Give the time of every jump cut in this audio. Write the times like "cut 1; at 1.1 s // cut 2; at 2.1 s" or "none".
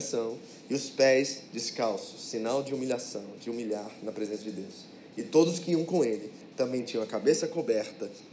none